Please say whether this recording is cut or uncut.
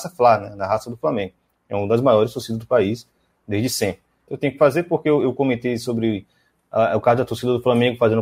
cut